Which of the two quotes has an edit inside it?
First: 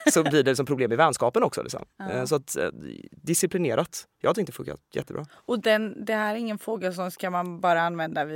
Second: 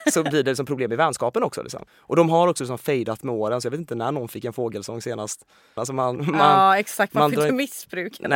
second; 2 cuts; at 1.9 s, 5.8 s

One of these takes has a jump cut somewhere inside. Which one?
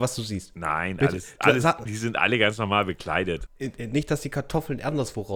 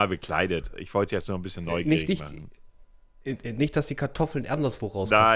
first; 2 cuts; at 1.9 s, 3.5 s

